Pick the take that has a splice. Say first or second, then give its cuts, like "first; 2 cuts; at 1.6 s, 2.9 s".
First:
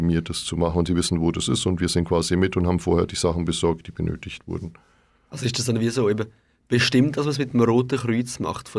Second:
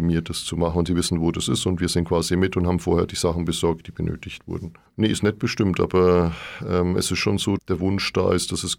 second; 2 cuts; at 4.9 s, 7.6 s